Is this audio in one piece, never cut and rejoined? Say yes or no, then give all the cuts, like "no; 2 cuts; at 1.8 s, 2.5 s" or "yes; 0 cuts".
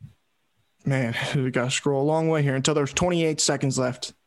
yes; 0 cuts